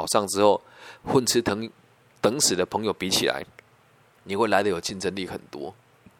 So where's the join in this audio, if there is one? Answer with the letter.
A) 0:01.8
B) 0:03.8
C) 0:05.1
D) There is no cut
D